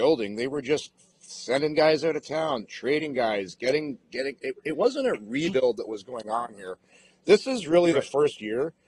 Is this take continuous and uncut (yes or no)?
yes